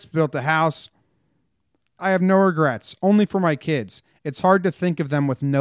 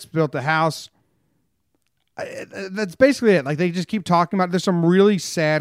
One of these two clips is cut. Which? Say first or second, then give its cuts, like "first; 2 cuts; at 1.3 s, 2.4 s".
first; 1 cut; at 2.0 s